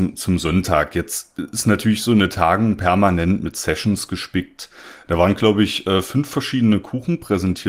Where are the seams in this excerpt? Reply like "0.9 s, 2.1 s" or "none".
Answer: 5.0 s